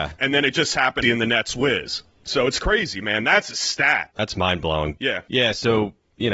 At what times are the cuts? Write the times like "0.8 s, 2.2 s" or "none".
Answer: 1.0 s